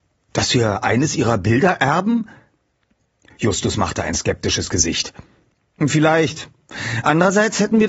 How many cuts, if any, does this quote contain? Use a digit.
0